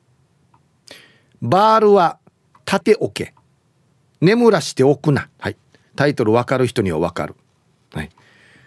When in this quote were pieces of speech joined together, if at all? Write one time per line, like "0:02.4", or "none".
0:02.8
0:05.3